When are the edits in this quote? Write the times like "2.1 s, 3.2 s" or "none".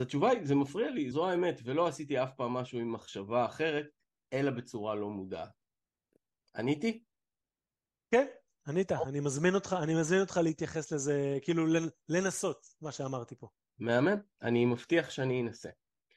1.1 s

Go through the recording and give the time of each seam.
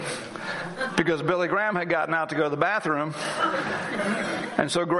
none

